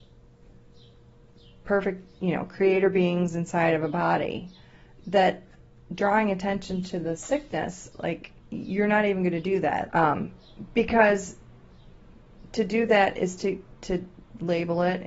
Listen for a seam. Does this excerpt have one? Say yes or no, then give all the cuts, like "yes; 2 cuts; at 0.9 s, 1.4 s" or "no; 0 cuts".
yes; 1 cut; at 9.9 s